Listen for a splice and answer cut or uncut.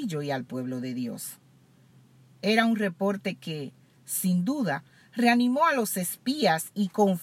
uncut